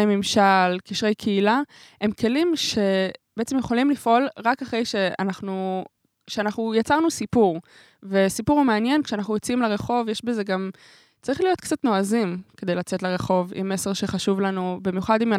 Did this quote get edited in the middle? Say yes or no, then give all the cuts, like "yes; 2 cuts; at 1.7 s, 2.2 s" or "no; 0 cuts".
no; 0 cuts